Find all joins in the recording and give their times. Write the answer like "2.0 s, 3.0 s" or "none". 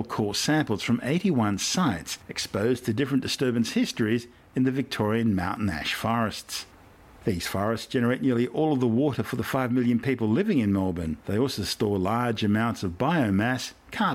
none